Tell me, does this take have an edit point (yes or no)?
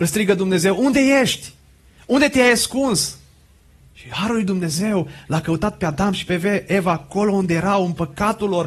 no